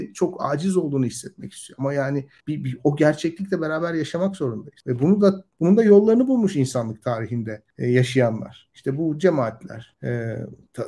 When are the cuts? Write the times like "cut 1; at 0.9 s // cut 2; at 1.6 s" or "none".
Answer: none